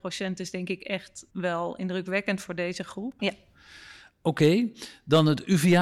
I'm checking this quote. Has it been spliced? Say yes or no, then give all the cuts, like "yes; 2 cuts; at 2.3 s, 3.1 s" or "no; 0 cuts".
yes; 2 cuts; at 1.3 s, 3.2 s